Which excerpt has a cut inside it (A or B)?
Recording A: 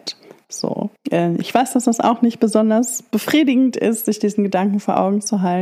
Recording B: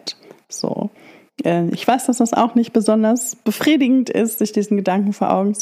A